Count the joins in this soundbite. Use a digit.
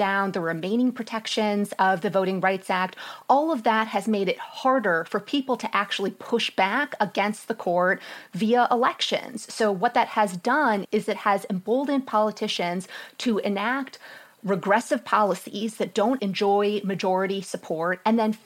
2